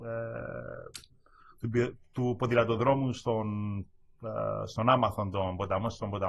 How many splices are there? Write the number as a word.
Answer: zero